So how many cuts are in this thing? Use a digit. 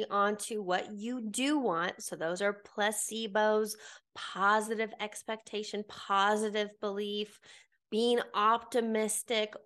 0